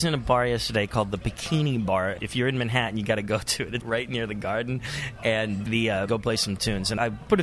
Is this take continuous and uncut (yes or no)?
no